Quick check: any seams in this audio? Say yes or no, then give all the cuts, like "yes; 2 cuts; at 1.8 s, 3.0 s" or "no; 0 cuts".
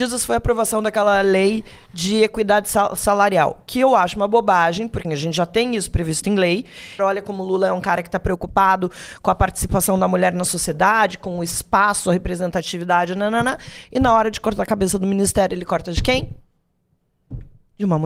yes; 2 cuts; at 5.0 s, 7.0 s